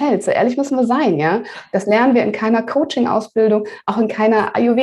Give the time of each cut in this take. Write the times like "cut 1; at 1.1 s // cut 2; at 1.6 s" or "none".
none